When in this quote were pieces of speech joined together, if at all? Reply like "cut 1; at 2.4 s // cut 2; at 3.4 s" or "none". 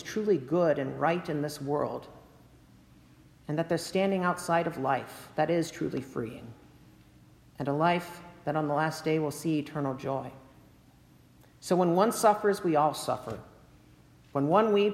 none

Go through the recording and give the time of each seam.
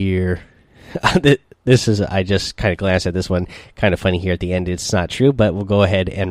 none

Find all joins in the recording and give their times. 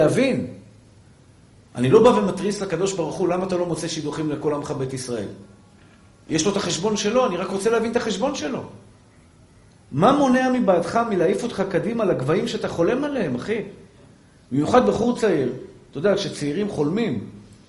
none

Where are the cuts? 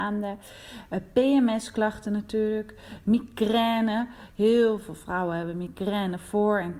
none

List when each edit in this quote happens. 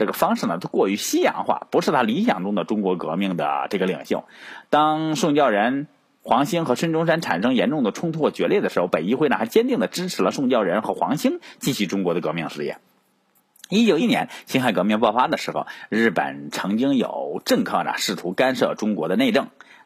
cut 1; at 14.0 s

